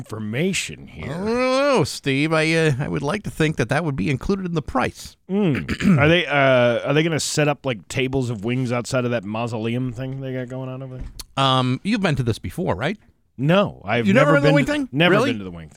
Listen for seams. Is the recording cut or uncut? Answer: uncut